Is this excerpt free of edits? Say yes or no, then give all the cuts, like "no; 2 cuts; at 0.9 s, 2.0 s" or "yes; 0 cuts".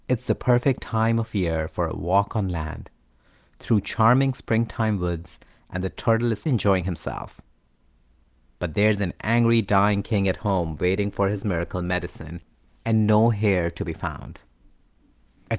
no; 1 cut; at 6.5 s